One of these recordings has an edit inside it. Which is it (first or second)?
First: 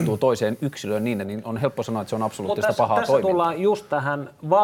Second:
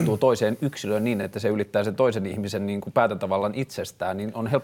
first